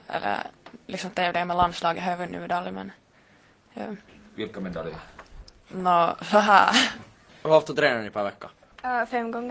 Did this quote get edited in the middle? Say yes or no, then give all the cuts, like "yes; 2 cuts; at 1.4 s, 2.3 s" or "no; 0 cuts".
yes; 1 cut; at 7.3 s